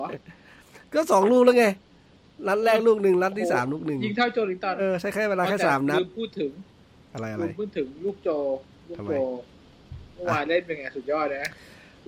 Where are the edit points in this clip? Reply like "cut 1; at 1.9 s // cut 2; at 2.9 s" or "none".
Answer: cut 1; at 4.8 s